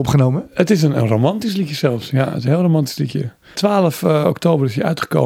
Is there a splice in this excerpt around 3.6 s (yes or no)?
yes